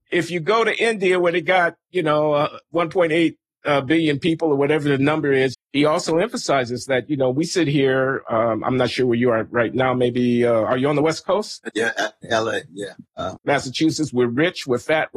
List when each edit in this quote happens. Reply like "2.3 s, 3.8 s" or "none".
5.5 s, 13.4 s